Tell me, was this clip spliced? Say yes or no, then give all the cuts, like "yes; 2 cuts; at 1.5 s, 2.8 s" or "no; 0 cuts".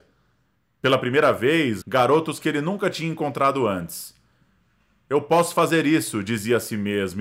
yes; 1 cut; at 1.8 s